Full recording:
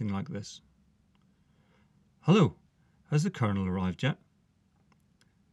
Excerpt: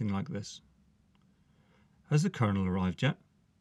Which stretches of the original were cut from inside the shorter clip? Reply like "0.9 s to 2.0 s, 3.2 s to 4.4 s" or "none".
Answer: 1.9 s to 2.9 s